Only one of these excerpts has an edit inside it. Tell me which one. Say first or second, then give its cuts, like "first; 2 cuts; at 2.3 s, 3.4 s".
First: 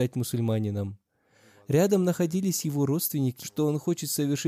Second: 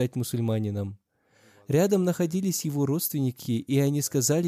first; 1 cut; at 3.4 s